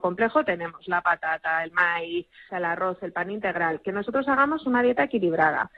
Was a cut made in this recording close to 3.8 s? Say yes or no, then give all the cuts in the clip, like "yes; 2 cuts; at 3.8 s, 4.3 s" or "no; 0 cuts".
no; 1 cut; at 2.5 s